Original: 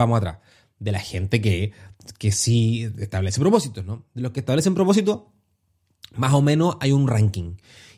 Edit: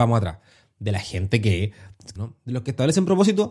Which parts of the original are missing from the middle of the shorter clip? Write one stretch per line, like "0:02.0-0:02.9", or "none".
0:02.2-0:03.8